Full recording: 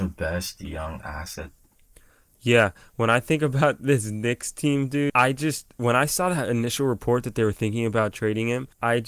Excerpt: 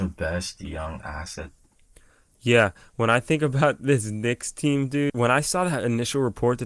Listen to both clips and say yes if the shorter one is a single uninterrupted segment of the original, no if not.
no